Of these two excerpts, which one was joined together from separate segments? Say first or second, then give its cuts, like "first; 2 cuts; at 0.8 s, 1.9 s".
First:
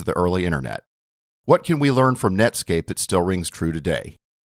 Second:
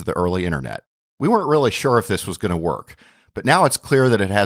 second; 1 cut; at 1.0 s